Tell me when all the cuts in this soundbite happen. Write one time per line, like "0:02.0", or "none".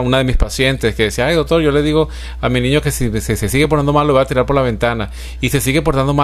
none